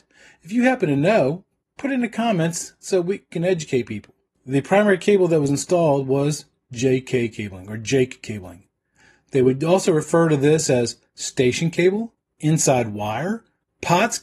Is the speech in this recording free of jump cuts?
no; 1 cut; at 4.3 s

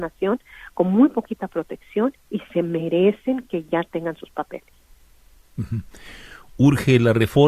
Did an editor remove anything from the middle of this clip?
no; 0 cuts

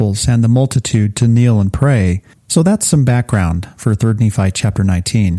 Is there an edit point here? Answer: yes; 1 cut; at 2.3 s

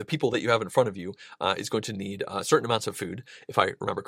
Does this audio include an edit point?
no; 0 cuts

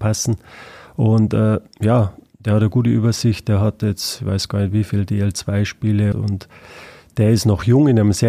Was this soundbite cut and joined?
yes; 1 cut; at 6.1 s

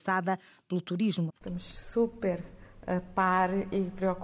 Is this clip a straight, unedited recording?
no; 1 cut; at 1.3 s

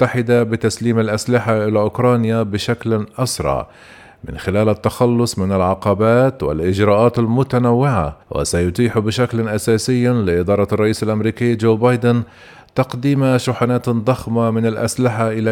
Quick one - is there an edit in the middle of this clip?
yes; 1 cut; at 8.2 s

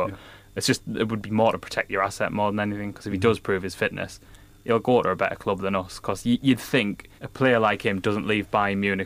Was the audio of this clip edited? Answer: yes; 1 cut; at 7.2 s

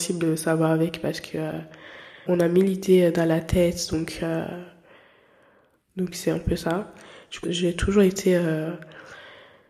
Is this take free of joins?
no; 2 cuts; at 2.3 s, 7.4 s

